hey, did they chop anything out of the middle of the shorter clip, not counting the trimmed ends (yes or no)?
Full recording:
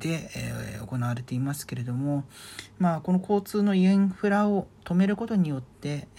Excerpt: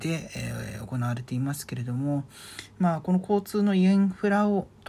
no